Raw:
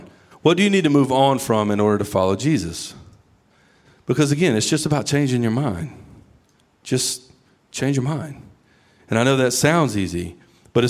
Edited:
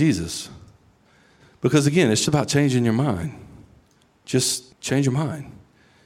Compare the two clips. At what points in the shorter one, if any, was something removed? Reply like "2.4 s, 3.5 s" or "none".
2.3 s, 4.7 s